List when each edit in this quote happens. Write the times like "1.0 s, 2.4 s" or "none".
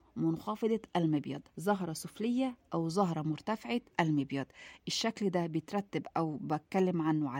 1.5 s, 3.9 s